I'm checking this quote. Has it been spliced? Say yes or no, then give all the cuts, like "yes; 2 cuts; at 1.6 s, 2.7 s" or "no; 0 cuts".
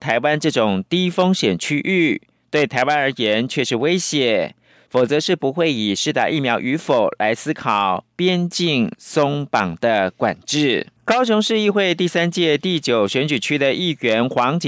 yes; 2 cuts; at 4.9 s, 11.0 s